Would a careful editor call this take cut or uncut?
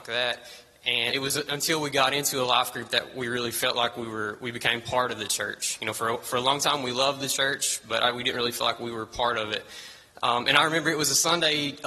cut